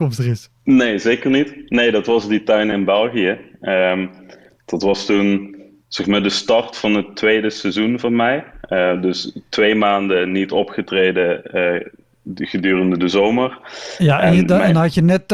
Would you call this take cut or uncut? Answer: uncut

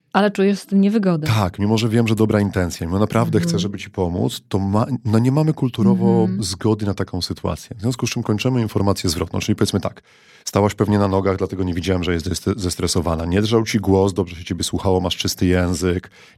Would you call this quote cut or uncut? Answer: uncut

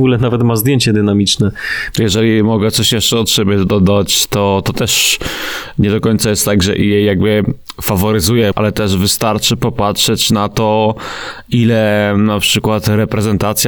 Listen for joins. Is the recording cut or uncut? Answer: cut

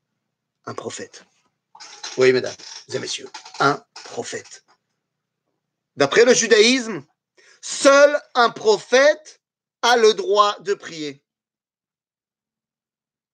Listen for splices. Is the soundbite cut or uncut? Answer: uncut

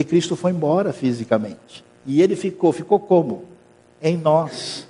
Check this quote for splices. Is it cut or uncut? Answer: cut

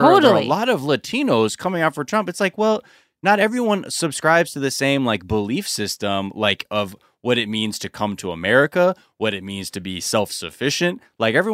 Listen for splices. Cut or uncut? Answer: uncut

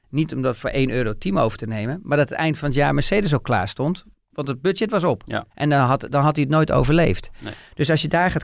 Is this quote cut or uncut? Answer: cut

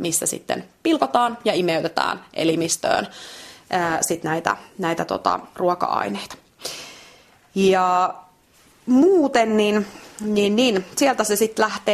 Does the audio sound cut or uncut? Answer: uncut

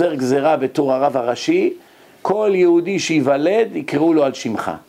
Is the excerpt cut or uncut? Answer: uncut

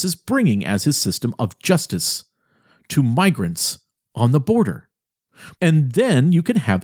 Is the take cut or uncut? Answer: cut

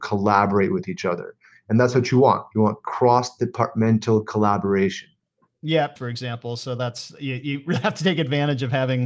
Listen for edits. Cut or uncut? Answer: cut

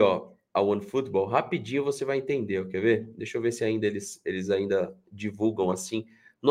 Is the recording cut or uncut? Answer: uncut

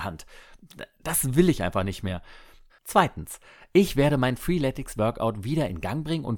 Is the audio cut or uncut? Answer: cut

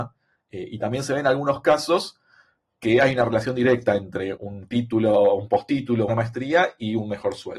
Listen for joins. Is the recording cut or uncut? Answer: cut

